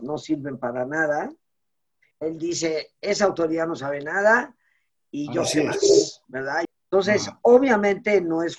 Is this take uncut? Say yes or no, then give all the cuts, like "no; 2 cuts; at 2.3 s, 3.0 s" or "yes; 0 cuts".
no; 2 cuts; at 2.1 s, 6.6 s